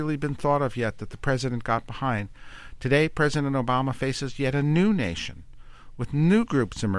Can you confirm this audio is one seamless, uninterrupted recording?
yes; 0 cuts

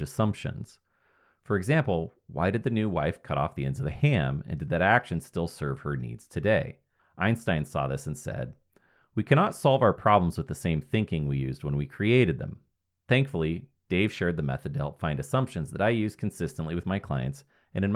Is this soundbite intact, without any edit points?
no; 1 cut; at 7.0 s

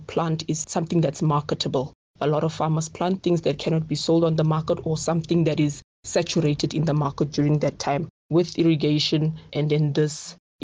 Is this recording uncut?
no; 2 cuts; at 8.2 s, 9.5 s

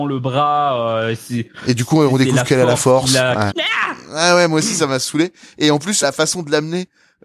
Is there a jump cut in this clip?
yes; 2 cuts; at 3.5 s, 6.0 s

